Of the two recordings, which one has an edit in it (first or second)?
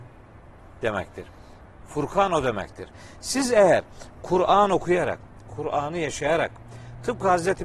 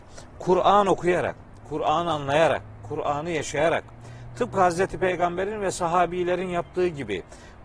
first